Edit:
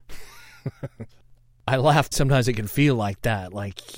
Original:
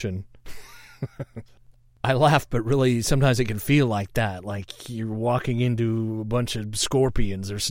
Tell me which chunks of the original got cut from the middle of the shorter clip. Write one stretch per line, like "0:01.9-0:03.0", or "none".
0:02.5-0:03.0